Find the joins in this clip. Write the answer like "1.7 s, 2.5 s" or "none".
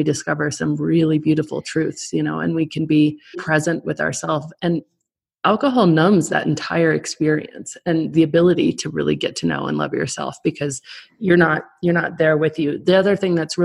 3.3 s